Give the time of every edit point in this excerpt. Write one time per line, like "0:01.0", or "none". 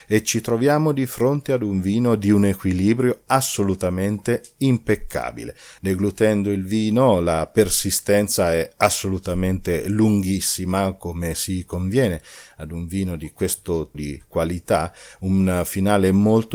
0:05.8
0:13.9